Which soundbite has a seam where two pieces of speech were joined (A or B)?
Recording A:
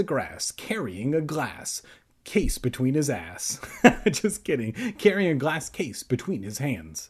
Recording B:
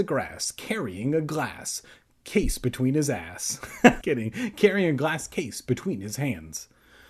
B